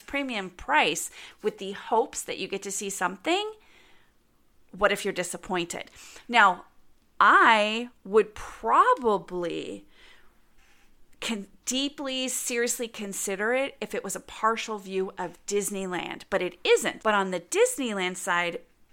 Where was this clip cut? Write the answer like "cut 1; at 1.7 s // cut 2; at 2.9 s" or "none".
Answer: cut 1; at 17.0 s

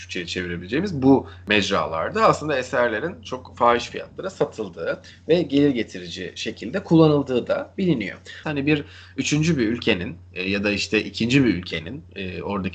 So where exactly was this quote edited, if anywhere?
cut 1; at 8.4 s

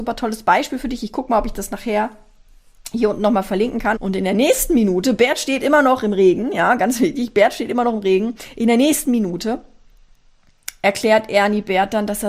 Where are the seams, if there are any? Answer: cut 1; at 4.0 s

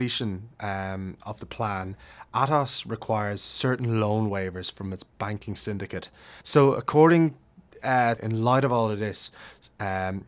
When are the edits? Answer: cut 1; at 6.4 s // cut 2; at 8.2 s

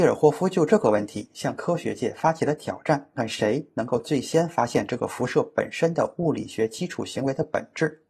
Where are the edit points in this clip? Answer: cut 1; at 3.2 s

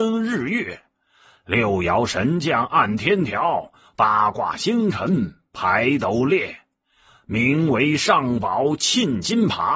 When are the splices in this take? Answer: none

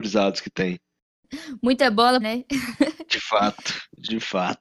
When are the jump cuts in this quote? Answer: cut 1; at 2.2 s

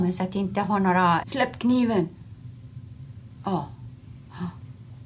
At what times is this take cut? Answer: cut 1; at 1.2 s

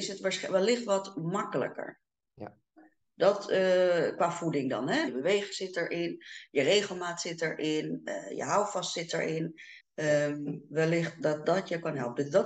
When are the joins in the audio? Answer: cut 1; at 5.1 s // cut 2; at 9.8 s

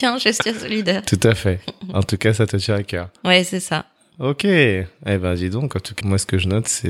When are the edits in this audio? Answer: cut 1; at 6.0 s

